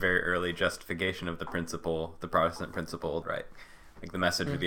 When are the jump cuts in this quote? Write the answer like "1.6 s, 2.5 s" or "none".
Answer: 3.2 s